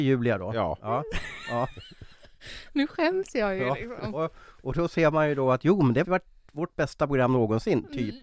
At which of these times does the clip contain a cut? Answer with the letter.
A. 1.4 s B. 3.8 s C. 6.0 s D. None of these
C